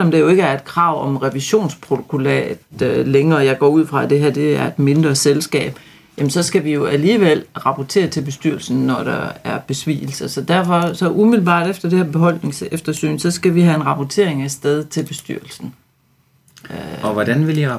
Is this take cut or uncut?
uncut